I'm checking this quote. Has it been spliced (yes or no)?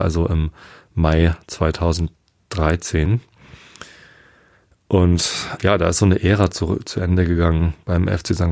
yes